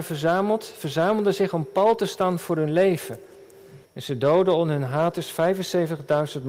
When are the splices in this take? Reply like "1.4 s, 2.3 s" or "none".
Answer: 3.8 s